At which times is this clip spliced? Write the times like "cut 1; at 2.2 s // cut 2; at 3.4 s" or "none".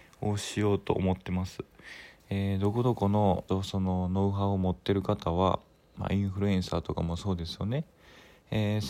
cut 1; at 3.5 s